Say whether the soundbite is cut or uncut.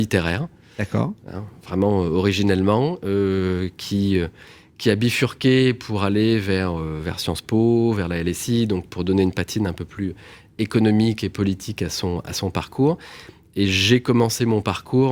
uncut